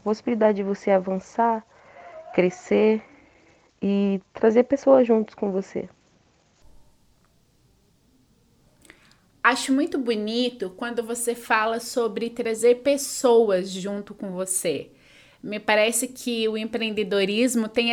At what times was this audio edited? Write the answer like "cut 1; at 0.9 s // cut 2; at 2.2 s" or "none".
none

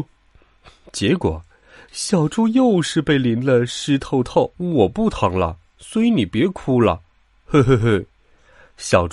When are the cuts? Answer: cut 1; at 4.5 s

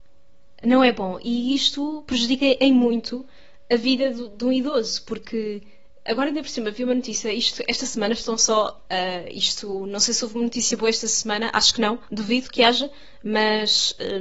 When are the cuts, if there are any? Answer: cut 1; at 8.9 s

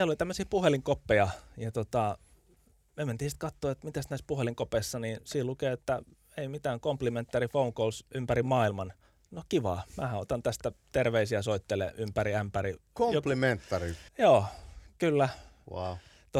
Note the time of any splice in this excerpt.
cut 1; at 14.1 s

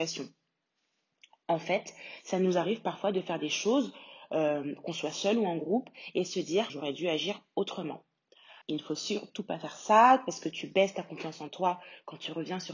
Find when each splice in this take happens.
cut 1; at 6.7 s // cut 2; at 8.6 s

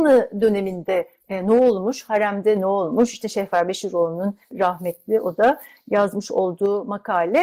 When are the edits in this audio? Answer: none

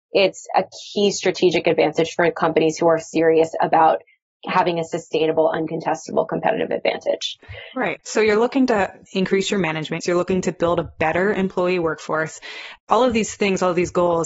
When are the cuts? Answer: cut 1; at 10.0 s

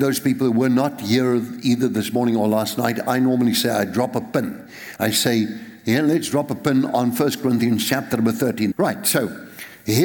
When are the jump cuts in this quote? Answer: cut 1; at 5.0 s // cut 2; at 8.7 s

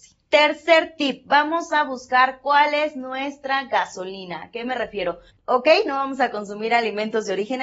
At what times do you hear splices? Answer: cut 1; at 5.3 s

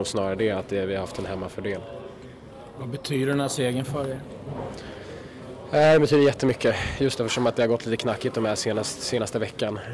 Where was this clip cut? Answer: none

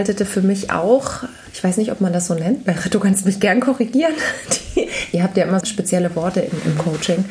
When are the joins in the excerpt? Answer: cut 1; at 5.6 s

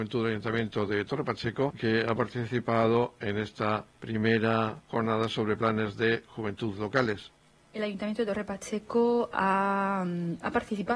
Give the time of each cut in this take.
none

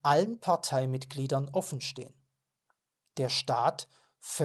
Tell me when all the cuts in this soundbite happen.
cut 1; at 3.0 s

